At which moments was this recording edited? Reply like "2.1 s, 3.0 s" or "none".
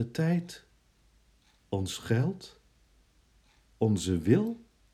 none